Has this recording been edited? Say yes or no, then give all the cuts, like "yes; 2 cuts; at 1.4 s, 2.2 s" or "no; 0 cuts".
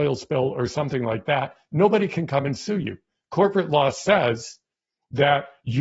no; 0 cuts